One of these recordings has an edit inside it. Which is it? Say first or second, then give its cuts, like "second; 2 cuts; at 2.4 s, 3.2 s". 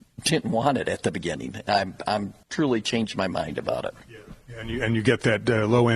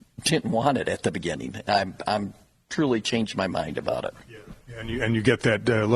first; 1 cut; at 2.4 s